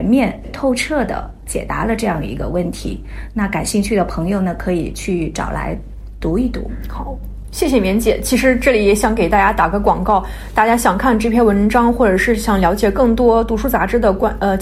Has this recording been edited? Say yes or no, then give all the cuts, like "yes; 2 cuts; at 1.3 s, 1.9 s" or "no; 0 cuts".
no; 0 cuts